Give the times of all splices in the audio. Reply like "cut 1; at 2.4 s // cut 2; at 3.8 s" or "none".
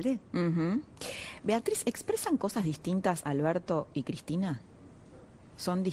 none